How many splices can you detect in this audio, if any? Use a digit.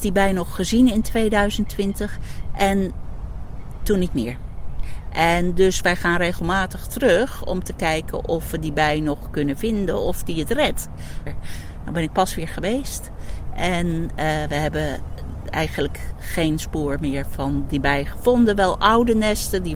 1